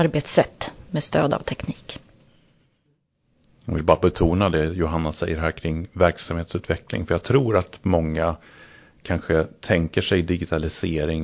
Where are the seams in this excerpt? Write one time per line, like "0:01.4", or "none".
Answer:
none

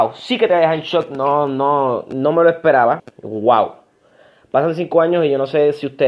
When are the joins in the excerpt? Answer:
0:03.0

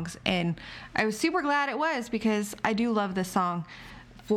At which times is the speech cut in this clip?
none

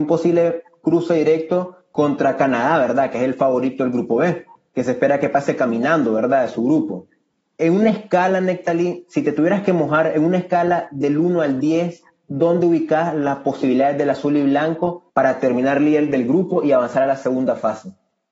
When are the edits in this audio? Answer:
0:15.1

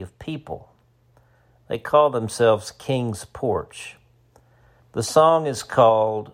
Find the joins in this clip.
0:04.8

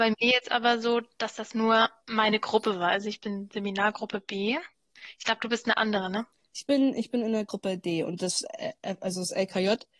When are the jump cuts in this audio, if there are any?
none

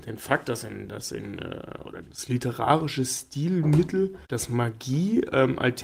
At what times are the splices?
0:02.0
0:04.2

